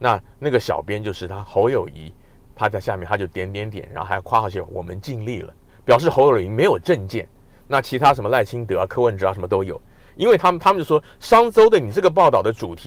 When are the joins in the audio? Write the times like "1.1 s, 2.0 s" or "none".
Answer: 10.1 s